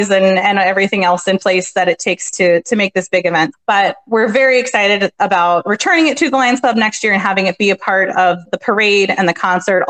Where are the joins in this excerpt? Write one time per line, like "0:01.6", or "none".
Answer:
0:03.5
0:08.4

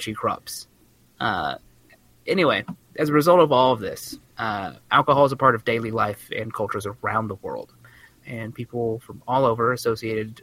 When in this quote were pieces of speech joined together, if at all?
0:08.2

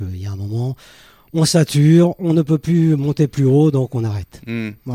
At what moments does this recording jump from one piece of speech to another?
none

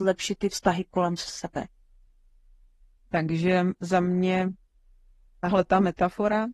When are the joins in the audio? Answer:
0:03.1

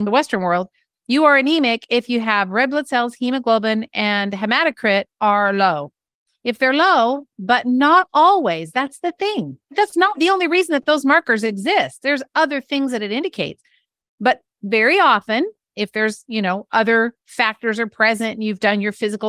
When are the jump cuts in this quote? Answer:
0:07.3

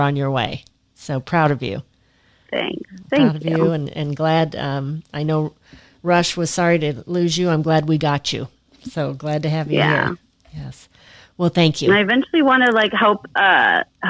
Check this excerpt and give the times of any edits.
none

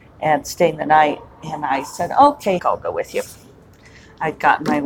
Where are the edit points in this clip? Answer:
0:02.6

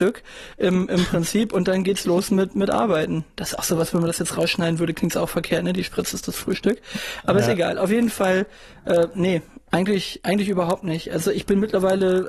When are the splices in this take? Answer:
none

